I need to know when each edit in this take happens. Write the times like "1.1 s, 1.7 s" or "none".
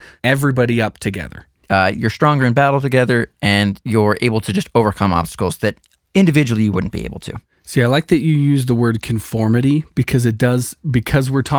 1.6 s